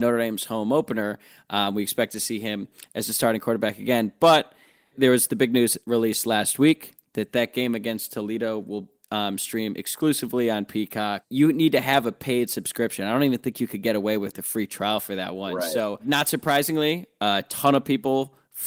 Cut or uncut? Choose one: uncut